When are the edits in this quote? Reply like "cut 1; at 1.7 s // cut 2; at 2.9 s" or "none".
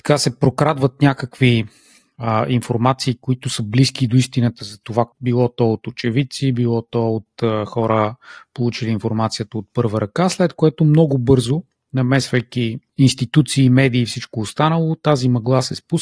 cut 1; at 5.1 s